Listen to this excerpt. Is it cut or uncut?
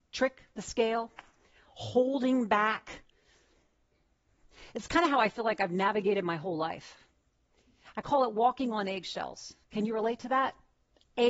cut